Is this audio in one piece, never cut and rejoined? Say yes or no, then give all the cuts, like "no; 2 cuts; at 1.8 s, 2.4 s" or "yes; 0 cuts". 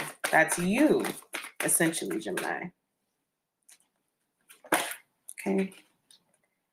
yes; 0 cuts